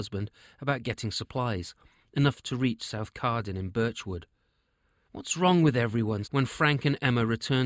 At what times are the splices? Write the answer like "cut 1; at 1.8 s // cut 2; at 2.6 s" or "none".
cut 1; at 5.1 s // cut 2; at 6.2 s